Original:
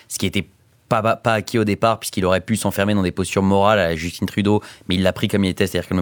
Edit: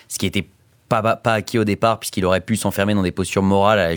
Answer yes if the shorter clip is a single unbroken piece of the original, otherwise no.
yes